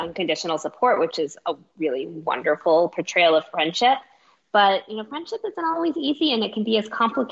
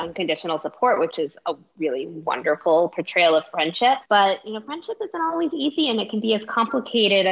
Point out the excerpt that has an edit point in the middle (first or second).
second